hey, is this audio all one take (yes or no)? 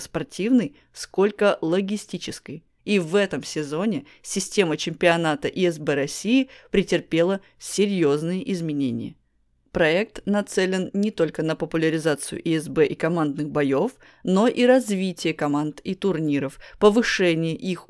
no